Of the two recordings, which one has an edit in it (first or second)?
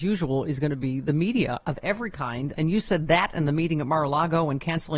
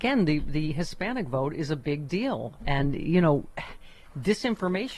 first